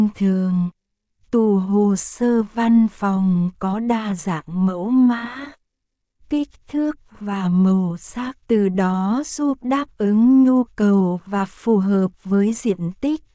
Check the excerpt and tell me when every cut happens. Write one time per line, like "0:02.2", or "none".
0:08.4

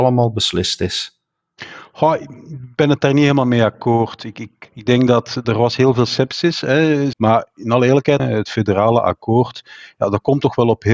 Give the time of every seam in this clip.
0:04.6
0:07.1
0:08.2

